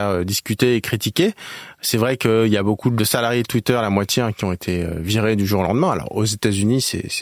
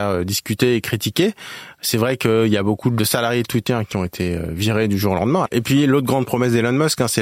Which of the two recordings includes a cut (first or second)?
second